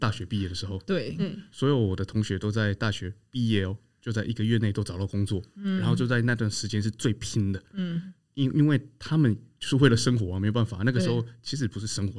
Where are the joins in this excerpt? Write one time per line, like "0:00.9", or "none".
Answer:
none

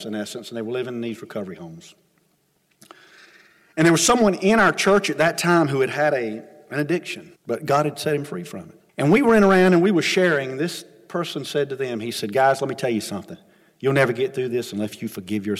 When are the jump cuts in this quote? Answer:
0:07.4
0:08.9

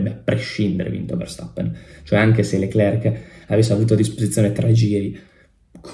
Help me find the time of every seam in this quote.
none

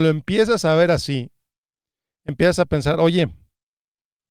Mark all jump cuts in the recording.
none

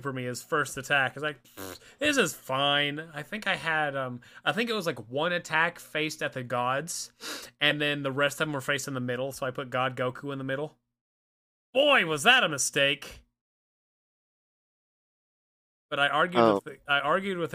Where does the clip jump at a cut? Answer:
none

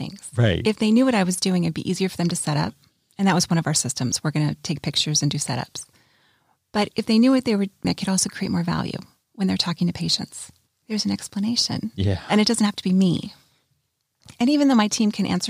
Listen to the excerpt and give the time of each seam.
0:07.8
0:10.7

